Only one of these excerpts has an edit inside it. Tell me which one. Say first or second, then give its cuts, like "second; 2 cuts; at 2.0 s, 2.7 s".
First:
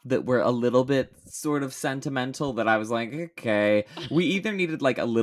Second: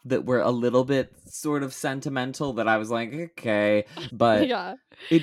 second; 1 cut; at 4.1 s